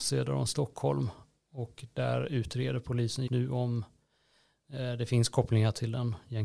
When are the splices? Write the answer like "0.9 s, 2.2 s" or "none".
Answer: 3.3 s